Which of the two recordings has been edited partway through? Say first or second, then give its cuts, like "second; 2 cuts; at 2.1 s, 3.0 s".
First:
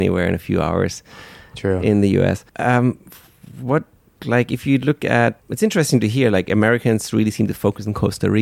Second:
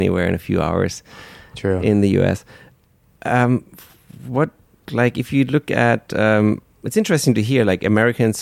first; 2 cuts; at 2.5 s, 5.4 s